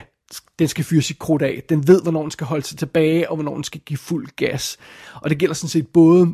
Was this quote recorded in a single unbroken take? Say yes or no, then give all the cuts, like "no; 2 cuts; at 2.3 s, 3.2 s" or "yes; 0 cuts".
yes; 0 cuts